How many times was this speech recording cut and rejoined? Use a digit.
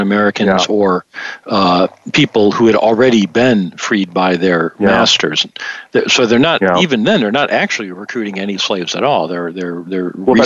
0